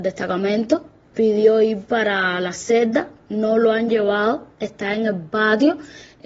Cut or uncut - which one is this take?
uncut